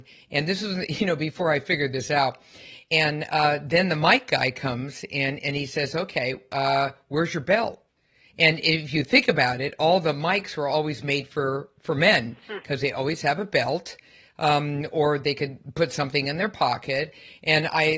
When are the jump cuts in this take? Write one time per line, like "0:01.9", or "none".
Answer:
none